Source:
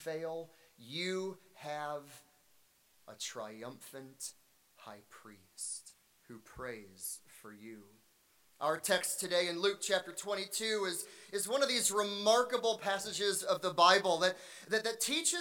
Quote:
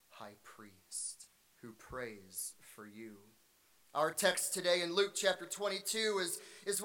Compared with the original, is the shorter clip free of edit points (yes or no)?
yes